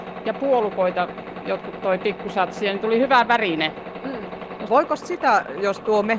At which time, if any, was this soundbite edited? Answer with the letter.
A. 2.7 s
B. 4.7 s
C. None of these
B